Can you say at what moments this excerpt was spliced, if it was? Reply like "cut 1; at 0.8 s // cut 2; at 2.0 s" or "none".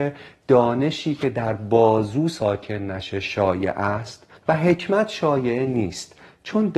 cut 1; at 4.4 s